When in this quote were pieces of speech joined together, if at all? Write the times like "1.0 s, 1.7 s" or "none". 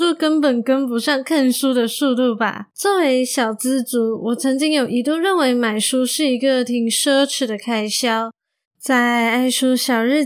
2.7 s, 8.6 s